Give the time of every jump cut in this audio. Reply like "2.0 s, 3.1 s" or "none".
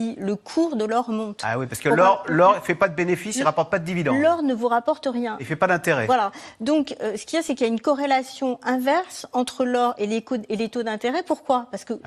none